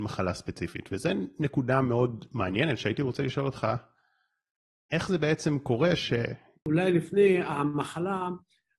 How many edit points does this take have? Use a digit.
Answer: 1